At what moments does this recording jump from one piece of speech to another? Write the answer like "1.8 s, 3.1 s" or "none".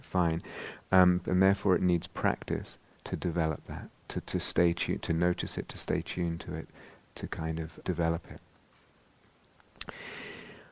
1.2 s, 7.8 s